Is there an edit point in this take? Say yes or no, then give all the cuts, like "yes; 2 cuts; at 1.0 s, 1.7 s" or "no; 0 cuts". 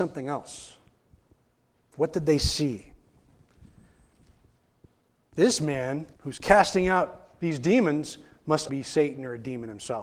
yes; 3 cuts; at 1.9 s, 6.1 s, 8.7 s